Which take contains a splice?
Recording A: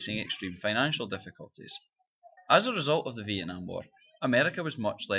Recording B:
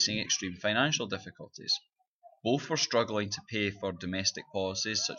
A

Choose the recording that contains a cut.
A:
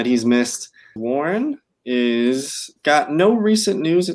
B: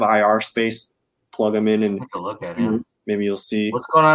A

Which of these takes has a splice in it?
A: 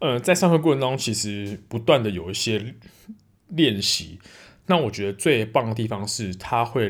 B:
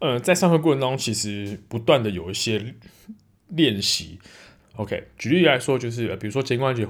B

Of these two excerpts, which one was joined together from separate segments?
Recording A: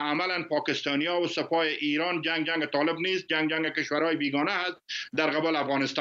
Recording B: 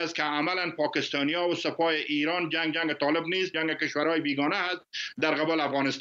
B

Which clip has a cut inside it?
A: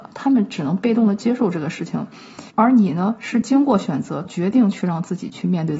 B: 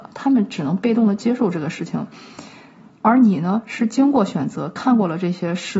A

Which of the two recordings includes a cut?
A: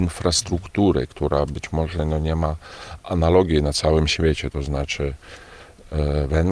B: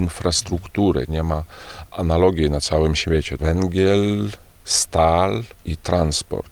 B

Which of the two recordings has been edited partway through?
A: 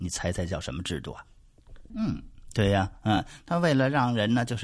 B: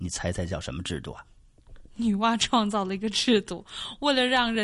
A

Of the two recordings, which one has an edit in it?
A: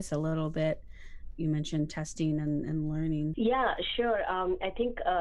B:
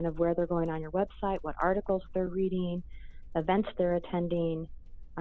A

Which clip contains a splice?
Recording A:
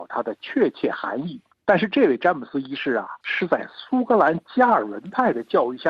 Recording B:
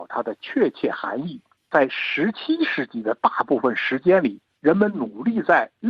A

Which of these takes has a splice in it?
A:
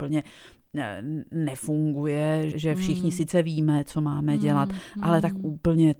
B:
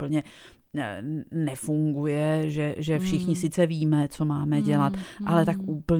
A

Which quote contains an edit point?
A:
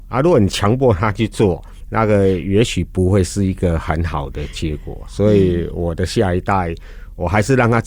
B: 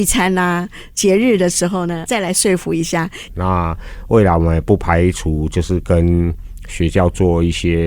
B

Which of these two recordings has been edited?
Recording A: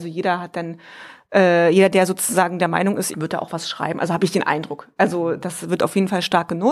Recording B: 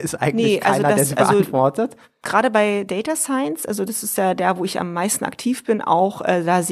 A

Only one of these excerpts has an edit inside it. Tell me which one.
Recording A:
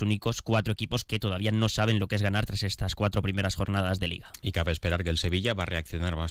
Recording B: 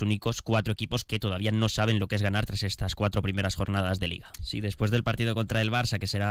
B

